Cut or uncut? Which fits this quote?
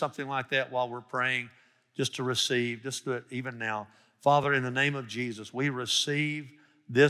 uncut